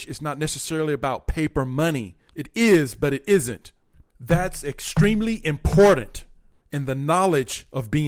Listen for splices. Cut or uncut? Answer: cut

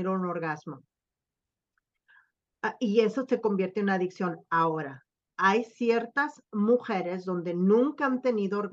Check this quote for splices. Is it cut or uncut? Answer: uncut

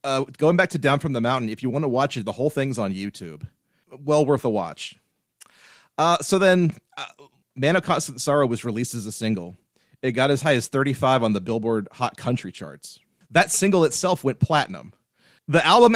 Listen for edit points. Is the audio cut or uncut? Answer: uncut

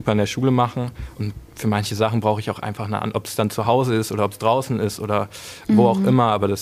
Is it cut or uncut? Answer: uncut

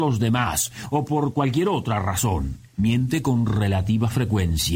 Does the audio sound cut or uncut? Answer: cut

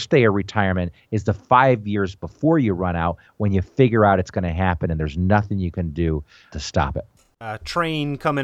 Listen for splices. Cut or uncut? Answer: uncut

